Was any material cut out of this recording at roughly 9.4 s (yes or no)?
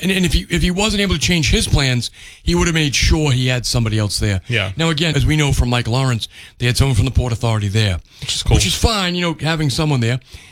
no